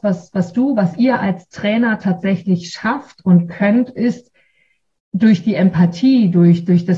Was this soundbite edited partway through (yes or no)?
no